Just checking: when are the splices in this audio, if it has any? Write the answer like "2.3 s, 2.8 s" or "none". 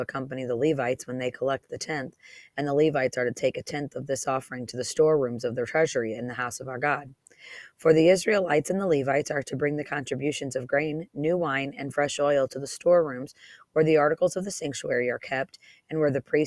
none